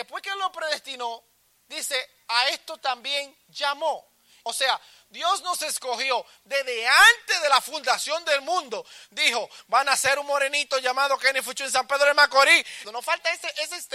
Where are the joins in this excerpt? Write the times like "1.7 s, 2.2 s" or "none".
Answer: 4.5 s, 12.8 s